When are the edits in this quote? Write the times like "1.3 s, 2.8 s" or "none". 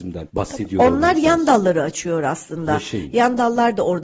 none